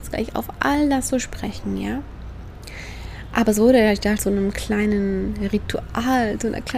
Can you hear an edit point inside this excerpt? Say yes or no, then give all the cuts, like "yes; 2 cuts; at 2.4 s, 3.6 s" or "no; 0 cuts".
yes; 1 cut; at 4.2 s